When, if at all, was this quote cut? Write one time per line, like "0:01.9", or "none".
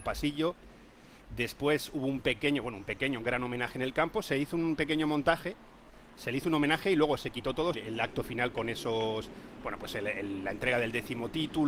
0:07.7

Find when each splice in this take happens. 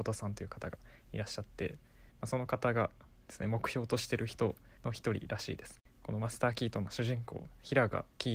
0:04.8

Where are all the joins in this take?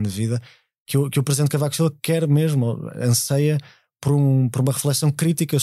none

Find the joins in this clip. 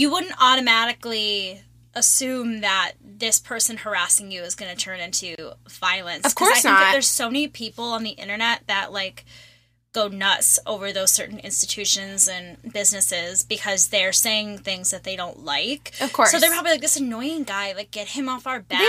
none

